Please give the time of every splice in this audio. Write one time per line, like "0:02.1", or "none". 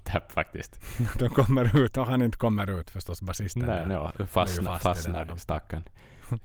none